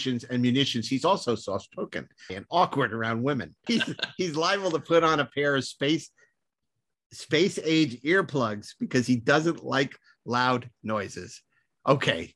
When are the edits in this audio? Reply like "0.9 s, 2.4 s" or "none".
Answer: 2.3 s, 3.7 s